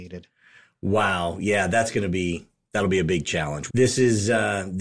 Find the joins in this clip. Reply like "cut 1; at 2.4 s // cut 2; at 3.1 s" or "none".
cut 1; at 3.7 s